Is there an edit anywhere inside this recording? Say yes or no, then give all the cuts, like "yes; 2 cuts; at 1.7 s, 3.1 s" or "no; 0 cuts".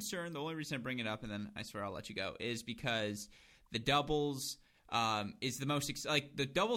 no; 0 cuts